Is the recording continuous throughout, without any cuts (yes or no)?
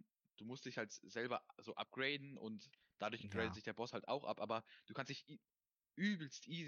yes